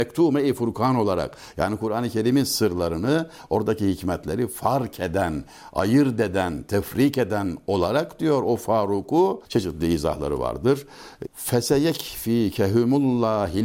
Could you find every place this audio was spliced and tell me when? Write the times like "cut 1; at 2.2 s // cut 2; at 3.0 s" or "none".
cut 1; at 9.5 s // cut 2; at 11.3 s